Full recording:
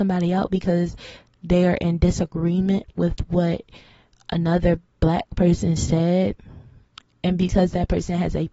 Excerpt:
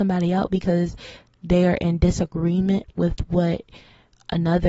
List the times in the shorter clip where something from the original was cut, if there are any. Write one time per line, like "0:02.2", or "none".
none